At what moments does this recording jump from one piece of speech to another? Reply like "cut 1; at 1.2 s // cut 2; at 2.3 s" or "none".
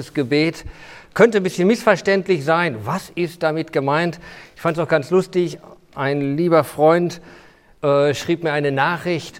none